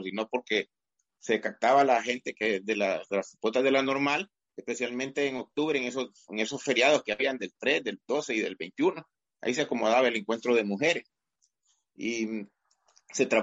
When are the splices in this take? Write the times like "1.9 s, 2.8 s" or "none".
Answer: none